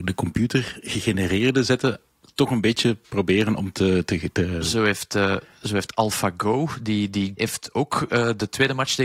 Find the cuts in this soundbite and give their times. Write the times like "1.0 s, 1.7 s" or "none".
7.4 s